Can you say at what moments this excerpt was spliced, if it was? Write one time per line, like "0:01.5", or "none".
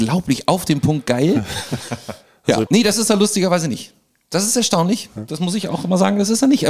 0:02.7